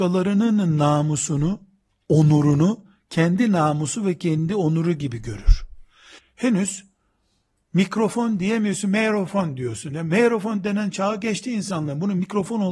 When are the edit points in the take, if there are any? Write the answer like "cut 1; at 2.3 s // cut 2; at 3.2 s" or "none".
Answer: cut 1; at 6.2 s